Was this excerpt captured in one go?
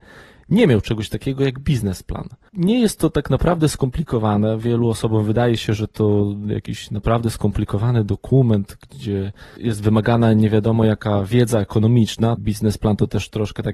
no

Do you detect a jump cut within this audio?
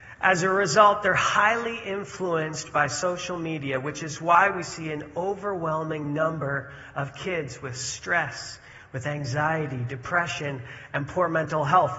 no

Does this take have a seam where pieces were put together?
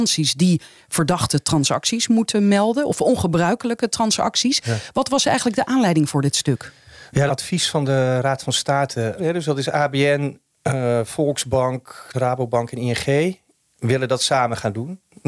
yes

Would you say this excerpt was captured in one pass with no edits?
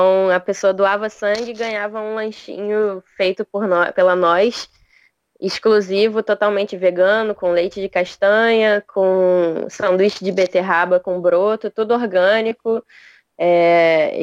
yes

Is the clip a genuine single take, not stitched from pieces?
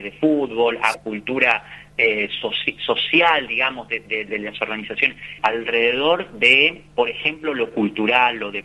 no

